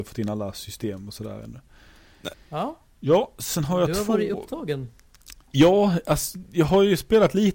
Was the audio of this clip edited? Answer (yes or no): yes